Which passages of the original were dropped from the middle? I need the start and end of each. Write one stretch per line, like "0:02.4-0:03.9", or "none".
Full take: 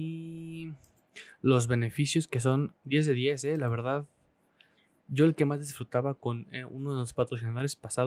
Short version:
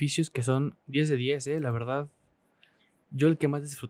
none